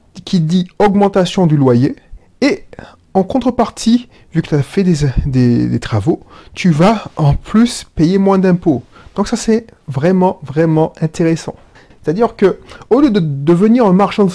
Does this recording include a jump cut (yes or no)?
yes